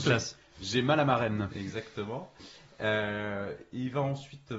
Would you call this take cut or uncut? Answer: uncut